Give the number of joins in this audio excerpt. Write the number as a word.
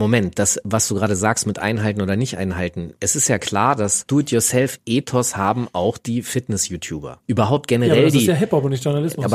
zero